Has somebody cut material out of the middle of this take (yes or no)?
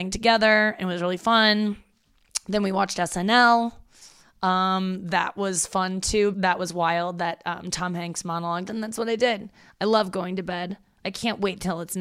yes